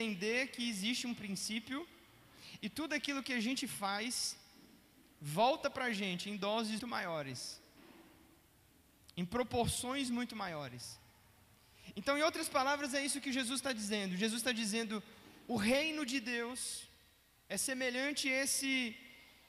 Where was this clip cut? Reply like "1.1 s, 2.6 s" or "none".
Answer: 6.8 s